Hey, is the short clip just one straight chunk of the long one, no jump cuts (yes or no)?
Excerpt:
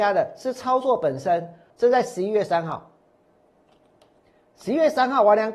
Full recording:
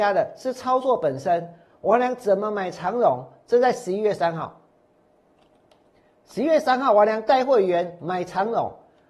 no